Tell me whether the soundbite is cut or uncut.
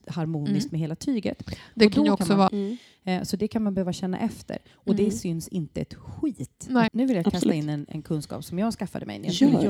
cut